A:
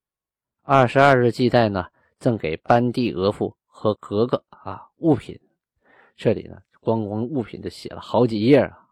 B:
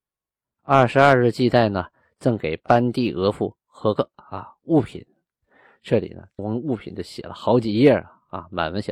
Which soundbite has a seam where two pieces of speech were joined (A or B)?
B